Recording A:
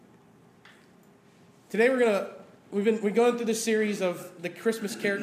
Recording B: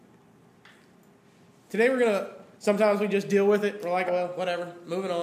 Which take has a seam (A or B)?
B